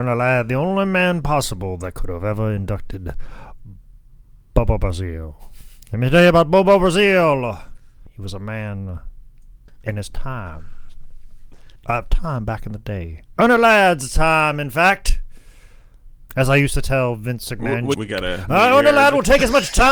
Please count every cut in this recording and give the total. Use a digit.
3